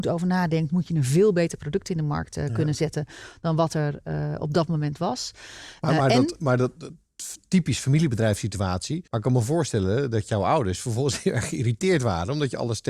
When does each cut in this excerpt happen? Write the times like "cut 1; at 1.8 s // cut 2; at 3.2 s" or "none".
cut 1; at 9.1 s